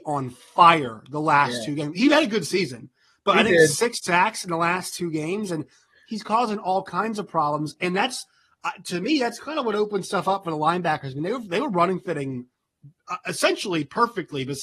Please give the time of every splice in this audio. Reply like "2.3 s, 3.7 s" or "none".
none